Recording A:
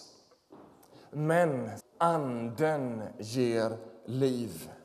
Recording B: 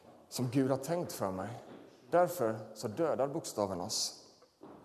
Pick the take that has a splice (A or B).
A